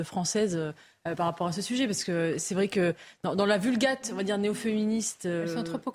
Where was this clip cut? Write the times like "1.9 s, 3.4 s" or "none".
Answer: none